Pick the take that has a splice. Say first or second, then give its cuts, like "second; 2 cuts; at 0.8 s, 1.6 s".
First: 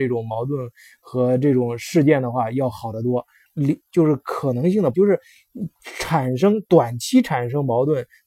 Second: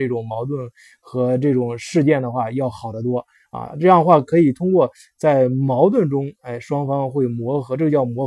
first; 2 cuts; at 3.5 s, 4.9 s